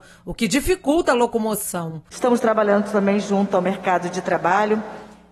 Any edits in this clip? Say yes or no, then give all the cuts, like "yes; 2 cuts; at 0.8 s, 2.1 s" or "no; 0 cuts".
yes; 1 cut; at 2.1 s